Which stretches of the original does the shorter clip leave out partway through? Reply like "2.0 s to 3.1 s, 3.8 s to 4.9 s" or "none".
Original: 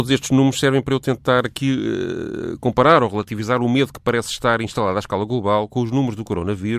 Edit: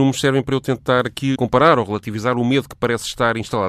1.7 s to 2.6 s